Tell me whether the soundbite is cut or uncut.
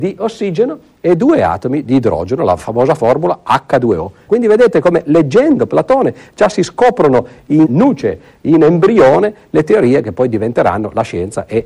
cut